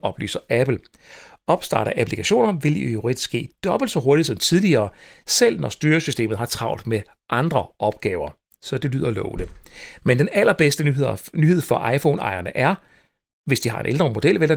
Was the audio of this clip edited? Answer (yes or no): no